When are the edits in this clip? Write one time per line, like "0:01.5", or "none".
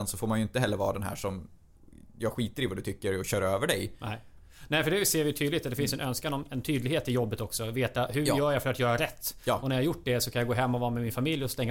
none